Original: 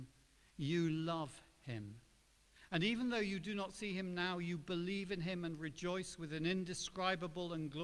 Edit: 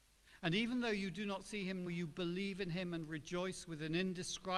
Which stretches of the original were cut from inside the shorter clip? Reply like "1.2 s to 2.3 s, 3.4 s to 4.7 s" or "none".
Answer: 4.1 s to 4.4 s